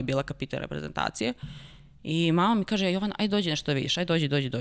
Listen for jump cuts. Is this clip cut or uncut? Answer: uncut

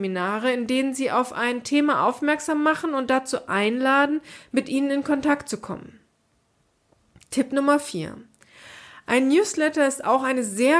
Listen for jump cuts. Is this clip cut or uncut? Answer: uncut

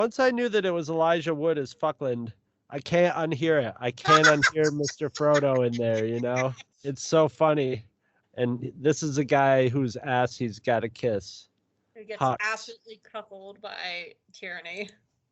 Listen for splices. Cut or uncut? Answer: cut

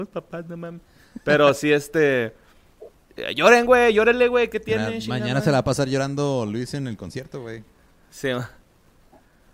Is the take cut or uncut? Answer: uncut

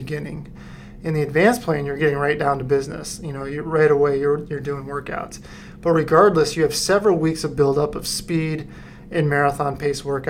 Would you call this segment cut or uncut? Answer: uncut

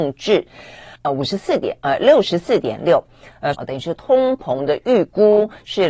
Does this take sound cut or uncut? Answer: cut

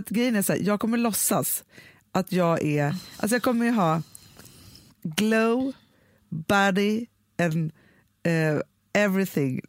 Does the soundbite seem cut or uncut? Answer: uncut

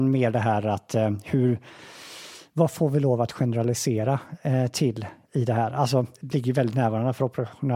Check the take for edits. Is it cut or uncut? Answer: cut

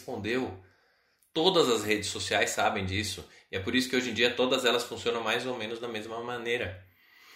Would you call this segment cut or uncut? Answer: uncut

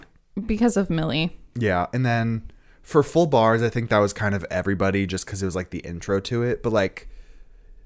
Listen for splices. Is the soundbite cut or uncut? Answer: uncut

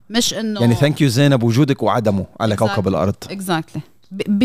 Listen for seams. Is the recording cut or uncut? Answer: uncut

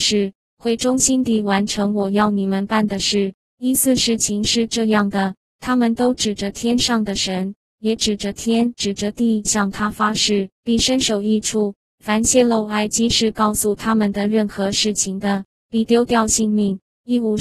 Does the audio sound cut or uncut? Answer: cut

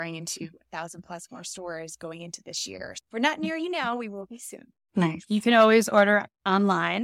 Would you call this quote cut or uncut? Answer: cut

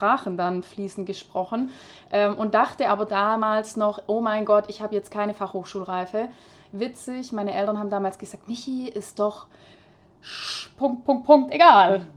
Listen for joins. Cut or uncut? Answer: uncut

